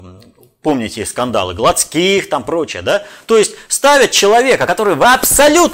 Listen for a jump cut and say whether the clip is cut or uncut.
uncut